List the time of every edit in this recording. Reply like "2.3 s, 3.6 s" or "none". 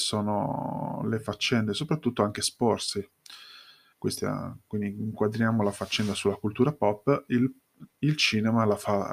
3.9 s